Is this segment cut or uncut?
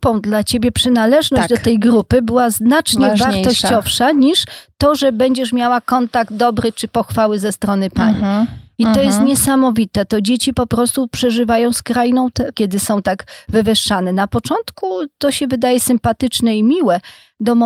cut